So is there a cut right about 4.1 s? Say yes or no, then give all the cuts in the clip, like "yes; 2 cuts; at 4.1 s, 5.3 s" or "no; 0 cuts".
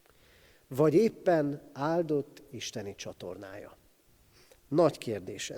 no; 0 cuts